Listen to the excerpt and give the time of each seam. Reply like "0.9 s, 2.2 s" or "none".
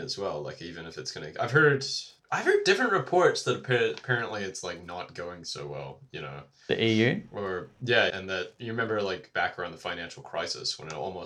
8.1 s